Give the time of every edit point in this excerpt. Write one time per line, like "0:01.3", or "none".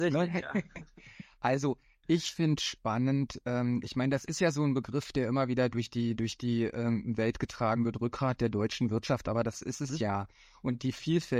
none